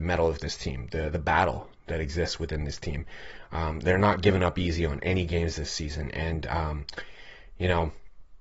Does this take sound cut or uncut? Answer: cut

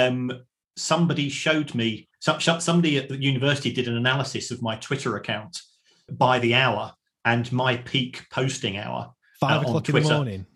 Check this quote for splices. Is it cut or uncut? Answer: cut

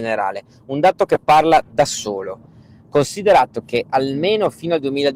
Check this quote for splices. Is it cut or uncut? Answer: uncut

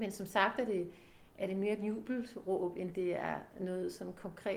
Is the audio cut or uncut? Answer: uncut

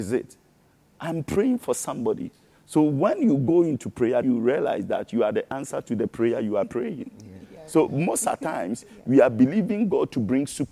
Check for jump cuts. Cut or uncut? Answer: cut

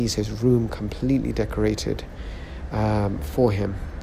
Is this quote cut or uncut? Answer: uncut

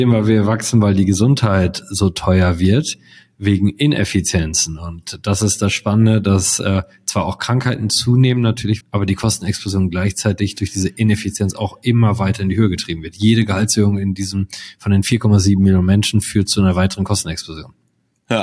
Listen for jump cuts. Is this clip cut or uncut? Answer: cut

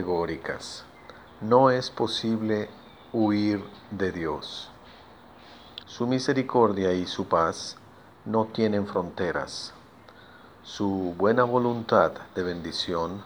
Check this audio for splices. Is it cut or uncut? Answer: cut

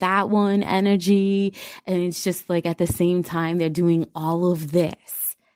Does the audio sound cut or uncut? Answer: uncut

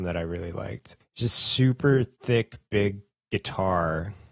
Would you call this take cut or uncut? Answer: cut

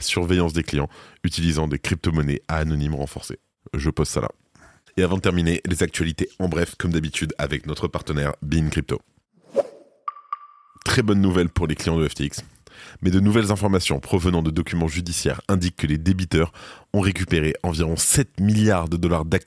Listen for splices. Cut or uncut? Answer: uncut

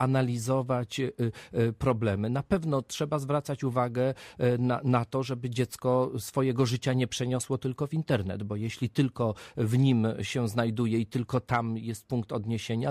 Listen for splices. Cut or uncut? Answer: uncut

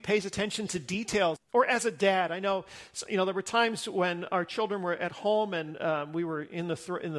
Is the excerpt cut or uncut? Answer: cut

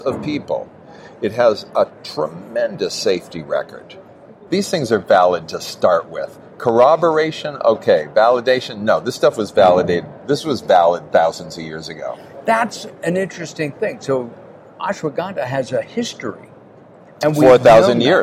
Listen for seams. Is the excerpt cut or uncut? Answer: cut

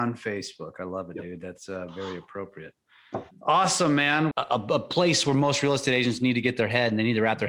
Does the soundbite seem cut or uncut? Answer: cut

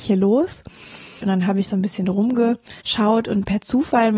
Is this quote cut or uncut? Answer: cut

